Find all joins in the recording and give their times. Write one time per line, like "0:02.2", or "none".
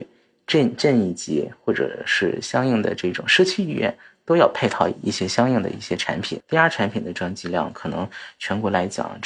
0:06.4